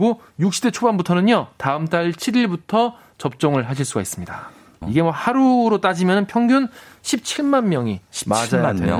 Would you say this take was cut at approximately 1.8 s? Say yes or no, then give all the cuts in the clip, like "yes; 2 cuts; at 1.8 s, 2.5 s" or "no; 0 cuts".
no; 1 cut; at 4.8 s